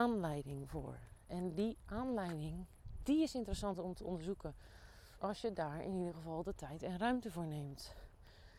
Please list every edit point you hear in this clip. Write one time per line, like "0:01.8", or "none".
0:05.2